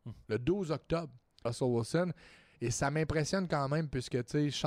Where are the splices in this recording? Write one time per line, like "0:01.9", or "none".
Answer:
0:01.5

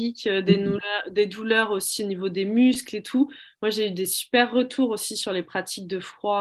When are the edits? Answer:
none

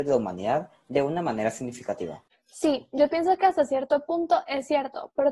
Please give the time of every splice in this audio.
none

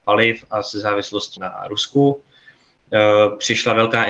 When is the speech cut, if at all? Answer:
0:01.4

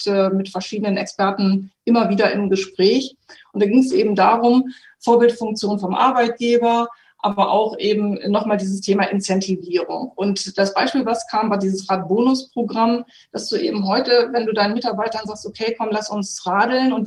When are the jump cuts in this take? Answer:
none

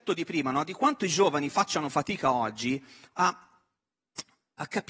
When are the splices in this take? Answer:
none

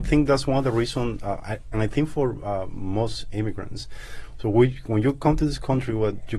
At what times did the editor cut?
0:01.7

